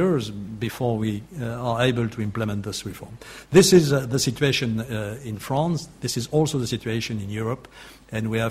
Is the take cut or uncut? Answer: uncut